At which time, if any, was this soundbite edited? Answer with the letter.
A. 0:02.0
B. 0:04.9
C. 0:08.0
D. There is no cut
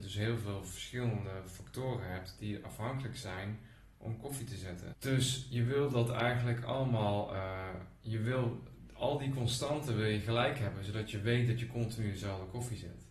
B